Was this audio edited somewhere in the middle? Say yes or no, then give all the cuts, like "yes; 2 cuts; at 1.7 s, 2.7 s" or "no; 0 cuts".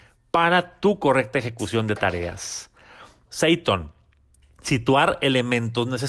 yes; 1 cut; at 3.3 s